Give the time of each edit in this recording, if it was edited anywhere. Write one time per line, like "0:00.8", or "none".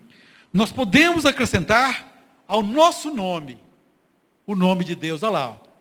none